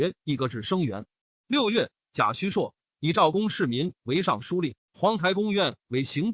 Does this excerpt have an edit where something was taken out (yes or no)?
no